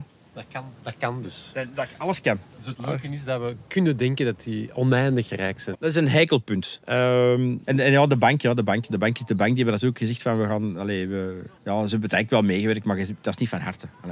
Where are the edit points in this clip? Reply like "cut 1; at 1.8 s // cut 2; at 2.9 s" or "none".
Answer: cut 1; at 5.7 s // cut 2; at 11.6 s